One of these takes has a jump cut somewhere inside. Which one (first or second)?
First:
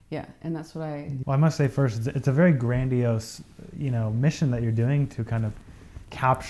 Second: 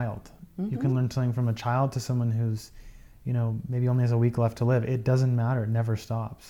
first